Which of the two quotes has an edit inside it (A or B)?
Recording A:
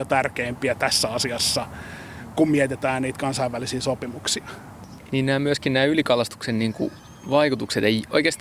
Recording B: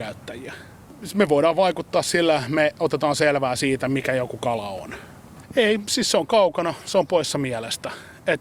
B